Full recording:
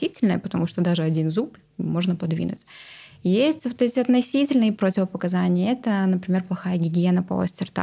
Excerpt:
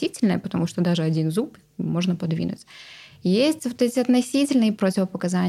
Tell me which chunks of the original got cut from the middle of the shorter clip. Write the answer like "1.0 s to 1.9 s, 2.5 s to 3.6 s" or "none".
none